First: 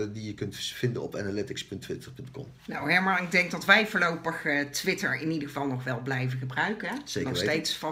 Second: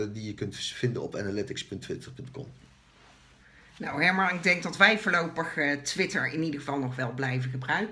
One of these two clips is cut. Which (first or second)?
first